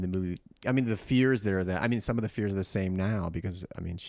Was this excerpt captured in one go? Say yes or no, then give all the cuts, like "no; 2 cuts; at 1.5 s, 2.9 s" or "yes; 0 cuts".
yes; 0 cuts